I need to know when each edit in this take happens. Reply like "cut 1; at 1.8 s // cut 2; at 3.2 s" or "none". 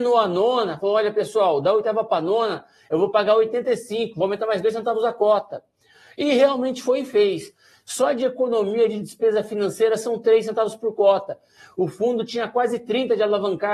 none

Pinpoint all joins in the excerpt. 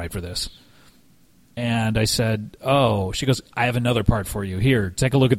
none

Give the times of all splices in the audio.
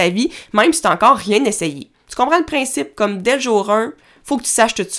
cut 1; at 2.0 s

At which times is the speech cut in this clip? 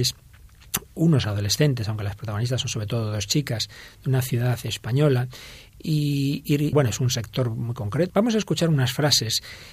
cut 1; at 6.7 s // cut 2; at 8.1 s

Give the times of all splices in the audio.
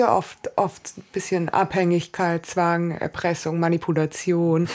none

